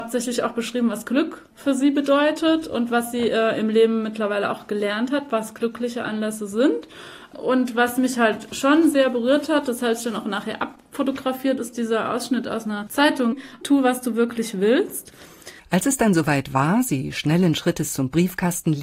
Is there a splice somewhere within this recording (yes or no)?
yes